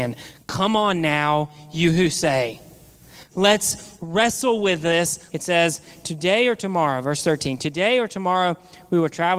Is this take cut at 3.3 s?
yes; 2 cuts; at 3.3 s, 5.3 s

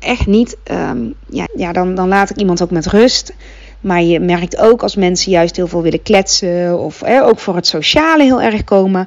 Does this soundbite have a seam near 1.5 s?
yes; 1 cut; at 1.5 s

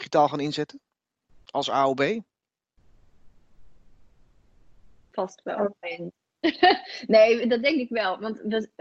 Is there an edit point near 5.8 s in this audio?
yes; 1 cut; at 5.8 s

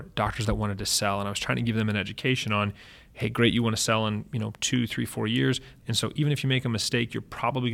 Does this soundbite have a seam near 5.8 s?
yes; 1 cut; at 5.8 s

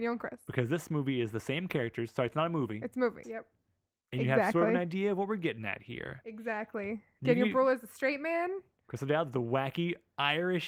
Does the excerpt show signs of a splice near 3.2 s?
yes; 1 cut; at 3.2 s

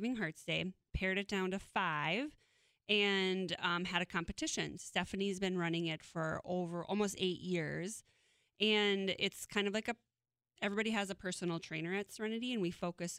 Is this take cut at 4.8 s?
yes; 1 cut; at 4.8 s

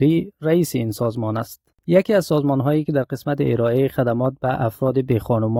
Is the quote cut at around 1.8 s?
yes; 1 cut; at 1.8 s

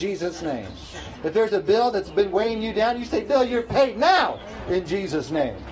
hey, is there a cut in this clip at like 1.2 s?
yes; 1 cut; at 1.2 s

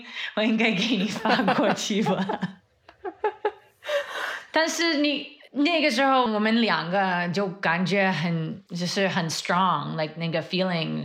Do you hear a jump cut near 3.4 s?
no; 2 cuts; at 6.3 s, 8.7 s

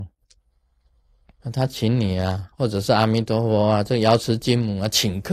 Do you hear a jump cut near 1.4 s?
yes; 1 cut; at 1.4 s

